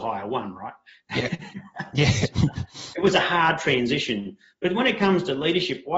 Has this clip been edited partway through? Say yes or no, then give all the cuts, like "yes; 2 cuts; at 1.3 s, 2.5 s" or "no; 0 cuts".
no; 0 cuts